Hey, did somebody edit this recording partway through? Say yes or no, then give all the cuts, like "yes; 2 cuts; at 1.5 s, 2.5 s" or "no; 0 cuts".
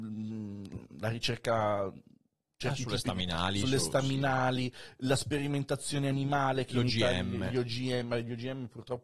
no; 0 cuts